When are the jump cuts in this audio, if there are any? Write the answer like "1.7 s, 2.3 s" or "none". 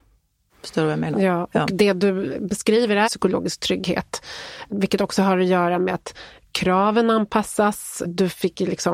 3.0 s

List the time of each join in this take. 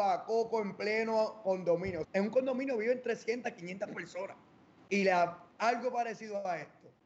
2.0 s, 4.8 s

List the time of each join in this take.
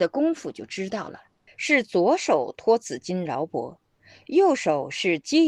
1.5 s

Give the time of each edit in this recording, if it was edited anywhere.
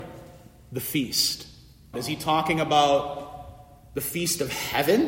1.9 s

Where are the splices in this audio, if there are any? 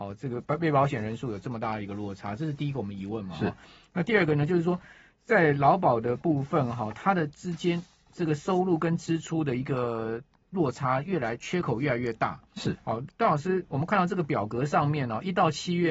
none

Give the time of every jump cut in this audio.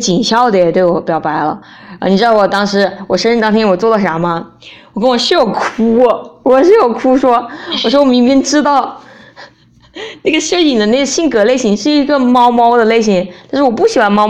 none

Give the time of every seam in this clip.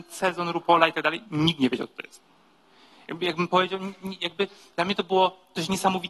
none

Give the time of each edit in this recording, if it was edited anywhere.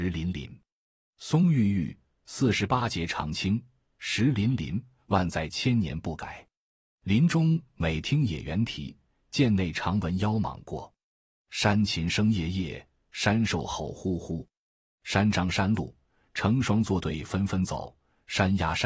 none

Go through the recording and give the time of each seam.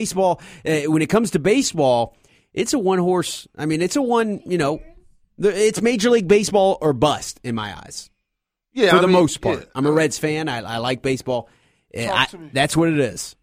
none

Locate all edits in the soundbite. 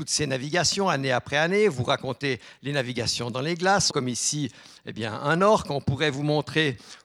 3.9 s

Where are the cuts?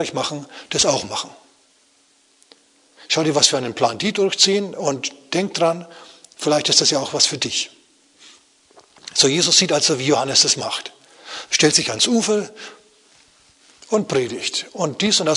none

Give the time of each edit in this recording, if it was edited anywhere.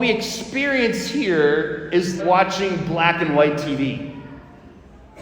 2.2 s

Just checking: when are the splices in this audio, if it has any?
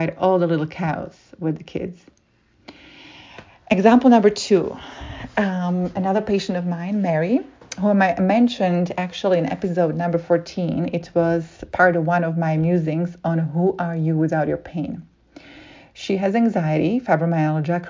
none

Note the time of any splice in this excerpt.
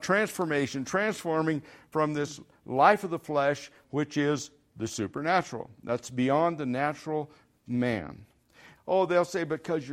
3.8 s, 8.8 s

